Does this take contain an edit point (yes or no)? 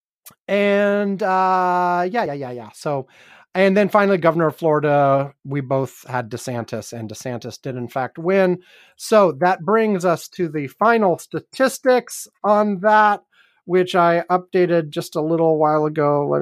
yes